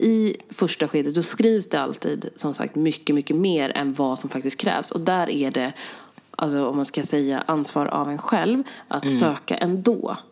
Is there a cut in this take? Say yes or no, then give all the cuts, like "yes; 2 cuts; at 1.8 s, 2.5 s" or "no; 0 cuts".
no; 0 cuts